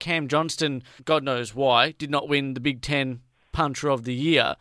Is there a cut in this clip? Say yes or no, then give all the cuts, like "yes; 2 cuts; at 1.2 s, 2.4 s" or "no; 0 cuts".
yes; 1 cut; at 1.0 s